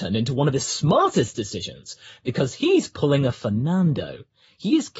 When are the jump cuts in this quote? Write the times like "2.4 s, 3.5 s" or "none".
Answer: none